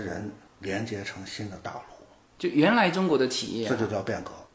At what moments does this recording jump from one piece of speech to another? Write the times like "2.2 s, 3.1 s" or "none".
none